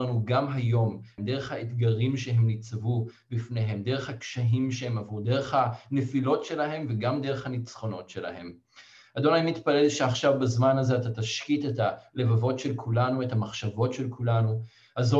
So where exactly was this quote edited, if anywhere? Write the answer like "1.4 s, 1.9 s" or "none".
1.2 s

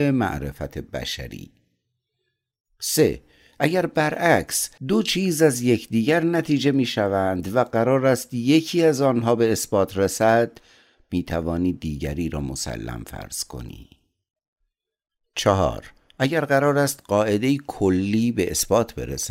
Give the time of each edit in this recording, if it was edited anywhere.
4.8 s

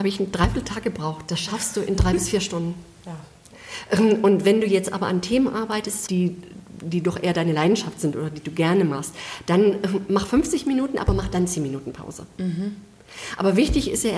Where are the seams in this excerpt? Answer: 6.1 s

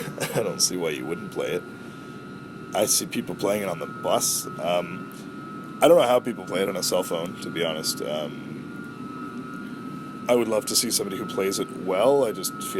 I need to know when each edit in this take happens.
none

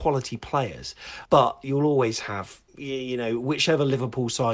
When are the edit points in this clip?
1.2 s, 2.7 s

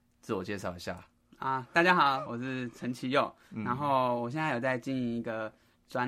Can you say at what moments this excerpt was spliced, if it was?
2.3 s

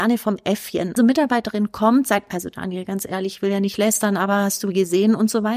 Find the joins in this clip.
1.0 s

